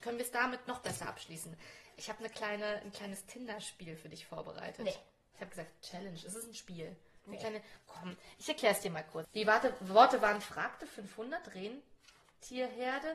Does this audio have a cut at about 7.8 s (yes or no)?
no